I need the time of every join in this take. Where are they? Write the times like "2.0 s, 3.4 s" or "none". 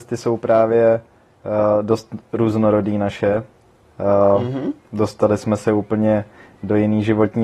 none

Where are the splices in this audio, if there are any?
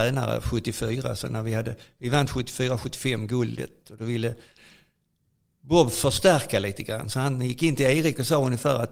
none

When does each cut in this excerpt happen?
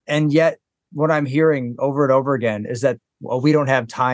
none

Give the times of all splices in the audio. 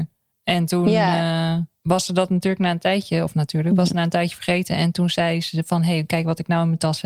none

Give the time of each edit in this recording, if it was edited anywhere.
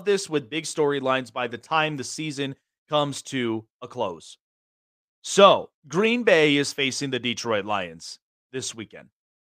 5.8 s

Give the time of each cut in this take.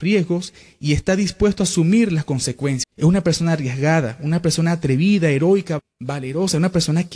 2.8 s, 5.8 s

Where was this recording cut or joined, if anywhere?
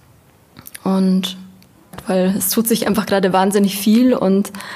none

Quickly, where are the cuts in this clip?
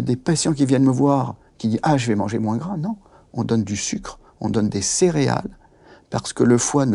none

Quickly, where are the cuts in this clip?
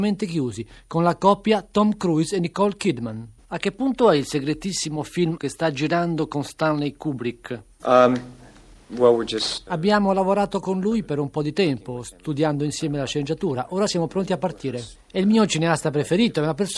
9.7 s, 15.0 s

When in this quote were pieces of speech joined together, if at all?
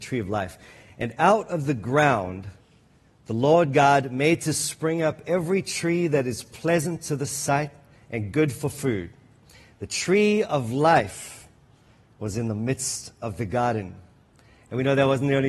none

